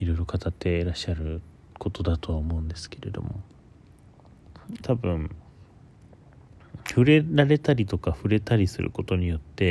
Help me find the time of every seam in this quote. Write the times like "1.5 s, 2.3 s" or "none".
4.8 s